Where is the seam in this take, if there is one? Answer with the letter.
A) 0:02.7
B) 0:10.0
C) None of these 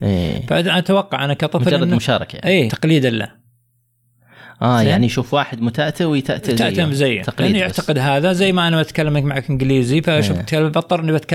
A